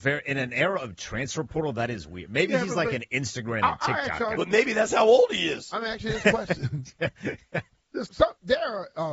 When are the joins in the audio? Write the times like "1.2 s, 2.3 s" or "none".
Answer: 4.4 s, 8.1 s